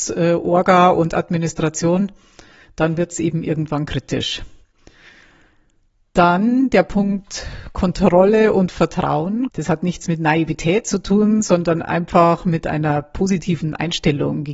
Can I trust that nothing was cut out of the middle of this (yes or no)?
no